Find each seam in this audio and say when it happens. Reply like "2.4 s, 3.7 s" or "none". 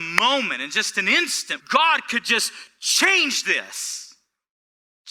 1.6 s